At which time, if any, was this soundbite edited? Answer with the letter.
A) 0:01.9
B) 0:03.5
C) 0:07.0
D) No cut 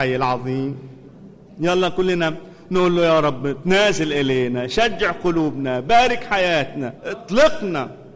C